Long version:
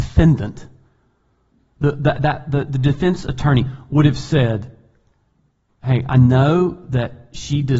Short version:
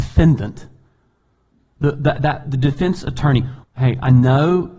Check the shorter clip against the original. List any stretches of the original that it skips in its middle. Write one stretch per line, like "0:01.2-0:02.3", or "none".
0:02.4-0:02.7
0:03.8-0:05.7